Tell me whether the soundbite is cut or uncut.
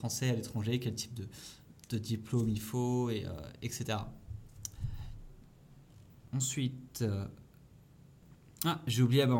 uncut